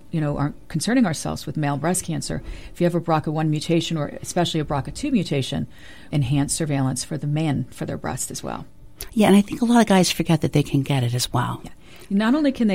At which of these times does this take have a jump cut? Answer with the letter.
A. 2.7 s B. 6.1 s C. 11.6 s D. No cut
B